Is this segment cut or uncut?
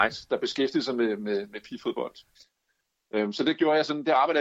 uncut